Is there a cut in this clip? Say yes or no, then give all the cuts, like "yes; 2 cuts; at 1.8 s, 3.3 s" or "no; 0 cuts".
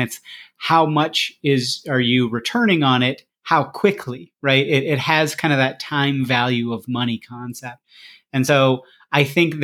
no; 0 cuts